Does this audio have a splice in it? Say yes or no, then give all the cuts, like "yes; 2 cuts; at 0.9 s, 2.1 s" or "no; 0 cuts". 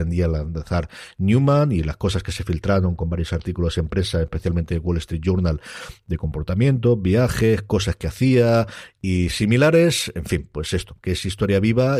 no; 0 cuts